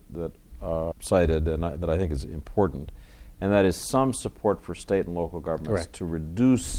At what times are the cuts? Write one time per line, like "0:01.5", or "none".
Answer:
0:00.9